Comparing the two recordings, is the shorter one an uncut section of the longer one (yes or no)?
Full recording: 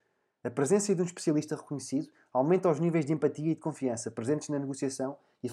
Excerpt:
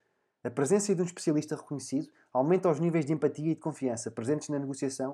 yes